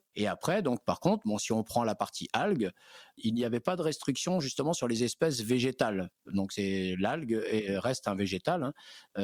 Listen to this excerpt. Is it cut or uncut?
uncut